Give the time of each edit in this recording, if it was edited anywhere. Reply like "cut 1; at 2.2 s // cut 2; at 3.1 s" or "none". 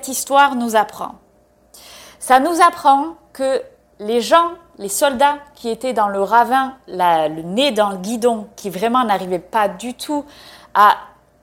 none